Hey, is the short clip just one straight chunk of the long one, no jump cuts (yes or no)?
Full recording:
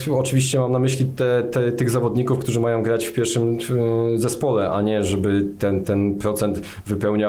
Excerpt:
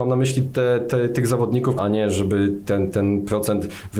no